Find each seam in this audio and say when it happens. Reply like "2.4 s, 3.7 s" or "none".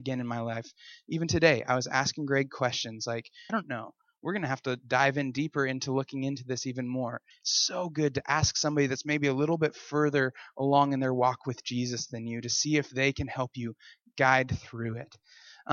3.5 s, 7.3 s